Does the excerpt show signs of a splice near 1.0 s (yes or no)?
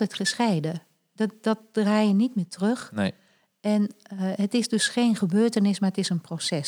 no